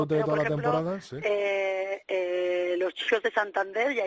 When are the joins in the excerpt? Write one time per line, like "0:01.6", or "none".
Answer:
none